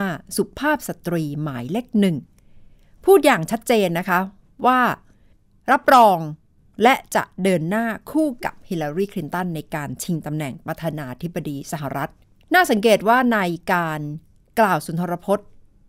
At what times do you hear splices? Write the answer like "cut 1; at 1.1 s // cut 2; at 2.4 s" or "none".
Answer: none